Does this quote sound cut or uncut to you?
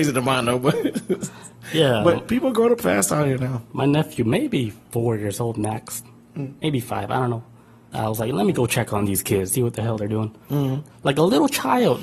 cut